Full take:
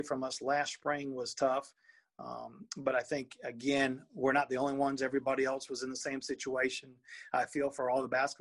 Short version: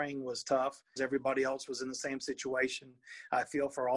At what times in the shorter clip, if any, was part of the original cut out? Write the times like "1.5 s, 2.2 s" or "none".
1.0 s